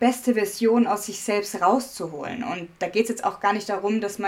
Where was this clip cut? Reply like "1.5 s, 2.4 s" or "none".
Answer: none